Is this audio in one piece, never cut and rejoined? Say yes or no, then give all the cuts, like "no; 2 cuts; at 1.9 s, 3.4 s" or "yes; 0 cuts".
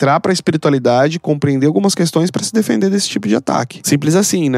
yes; 0 cuts